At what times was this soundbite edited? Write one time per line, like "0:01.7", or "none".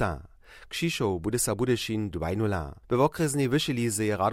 0:02.8